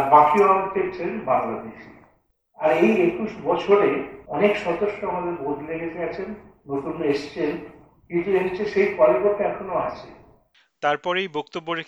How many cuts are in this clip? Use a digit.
1